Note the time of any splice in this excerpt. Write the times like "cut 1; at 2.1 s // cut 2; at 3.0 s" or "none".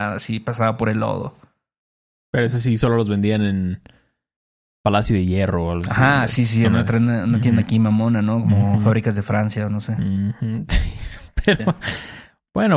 none